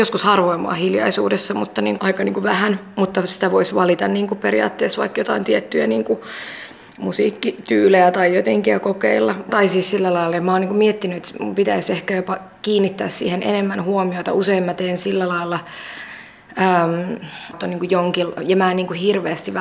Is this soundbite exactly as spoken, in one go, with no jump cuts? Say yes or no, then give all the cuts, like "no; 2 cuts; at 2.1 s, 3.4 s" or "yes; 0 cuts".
no; 3 cuts; at 2.0 s, 9.5 s, 17.5 s